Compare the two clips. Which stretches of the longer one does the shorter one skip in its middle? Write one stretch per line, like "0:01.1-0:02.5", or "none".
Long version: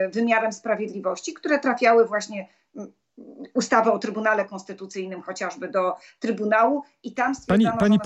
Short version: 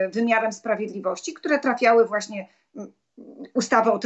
none